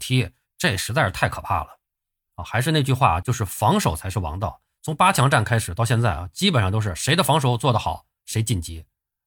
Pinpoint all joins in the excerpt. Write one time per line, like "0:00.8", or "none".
none

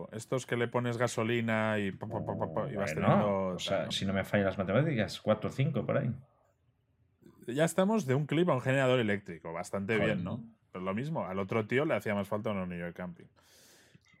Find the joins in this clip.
0:03.9

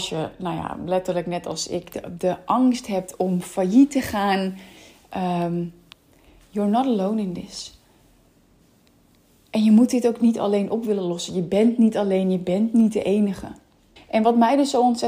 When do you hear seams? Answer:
0:14.0

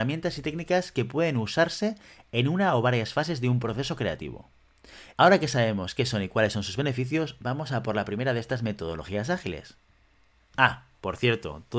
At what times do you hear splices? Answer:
0:05.1

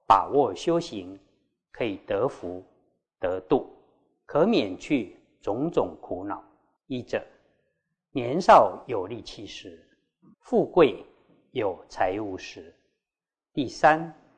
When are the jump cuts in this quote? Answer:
0:06.8
0:10.3

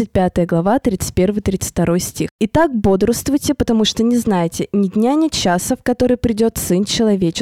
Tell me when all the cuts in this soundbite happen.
none

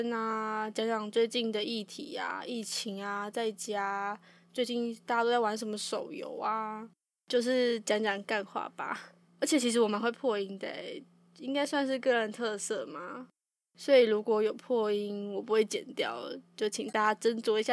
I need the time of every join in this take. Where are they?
0:09.2

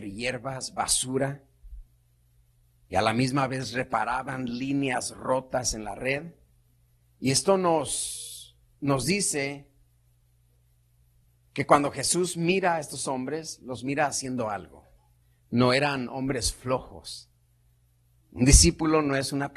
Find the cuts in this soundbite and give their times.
none

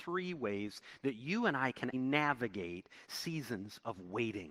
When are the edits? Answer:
0:01.9

